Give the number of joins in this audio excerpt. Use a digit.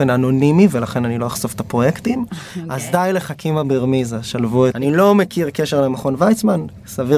1